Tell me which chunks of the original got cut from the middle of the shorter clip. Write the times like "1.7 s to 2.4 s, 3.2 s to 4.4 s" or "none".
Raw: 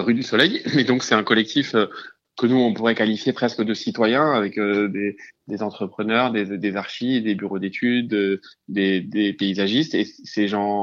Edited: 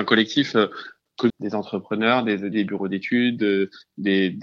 2.5 s to 5.4 s, 6.6 s to 7.2 s